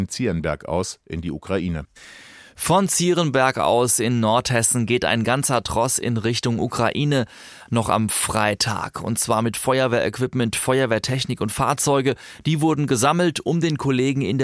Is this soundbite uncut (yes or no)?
yes